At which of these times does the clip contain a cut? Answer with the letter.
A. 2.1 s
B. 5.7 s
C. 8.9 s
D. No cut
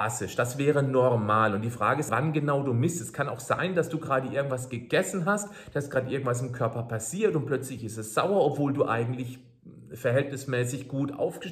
A